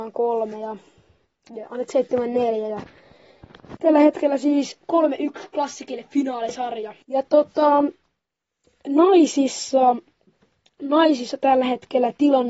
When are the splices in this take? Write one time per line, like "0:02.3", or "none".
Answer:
0:03.8
0:07.0